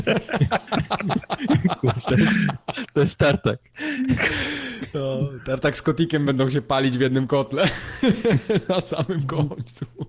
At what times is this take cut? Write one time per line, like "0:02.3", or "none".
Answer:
none